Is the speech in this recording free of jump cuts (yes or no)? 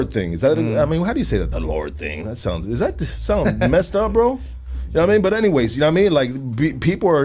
yes